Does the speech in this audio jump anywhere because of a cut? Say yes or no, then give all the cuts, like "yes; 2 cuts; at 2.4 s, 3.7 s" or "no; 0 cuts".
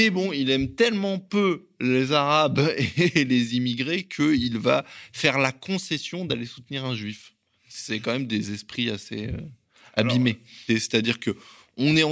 yes; 1 cut; at 10.7 s